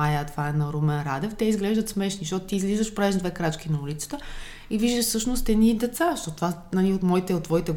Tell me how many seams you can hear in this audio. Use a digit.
0